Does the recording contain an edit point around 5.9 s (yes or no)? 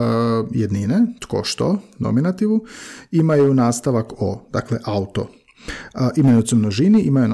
no